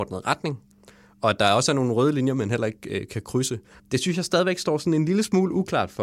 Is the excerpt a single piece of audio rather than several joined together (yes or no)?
no